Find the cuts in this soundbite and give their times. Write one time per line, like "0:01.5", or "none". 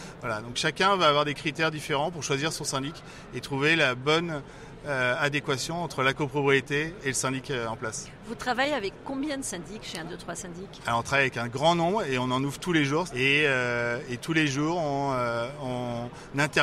0:13.1